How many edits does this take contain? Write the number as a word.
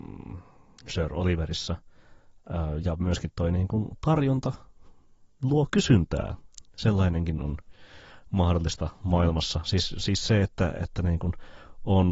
one